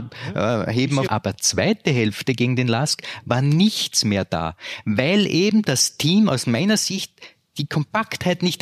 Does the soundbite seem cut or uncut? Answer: cut